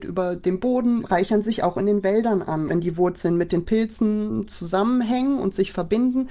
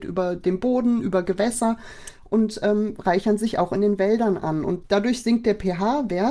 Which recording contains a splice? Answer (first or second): first